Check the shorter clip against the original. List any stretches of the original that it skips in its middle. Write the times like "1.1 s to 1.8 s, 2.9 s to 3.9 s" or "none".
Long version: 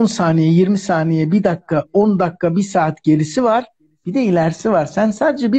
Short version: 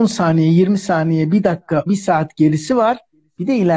1.9 s to 2.5 s